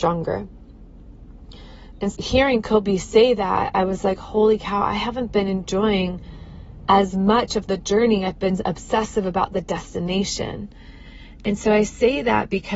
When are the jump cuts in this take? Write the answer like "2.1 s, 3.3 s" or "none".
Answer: 2.1 s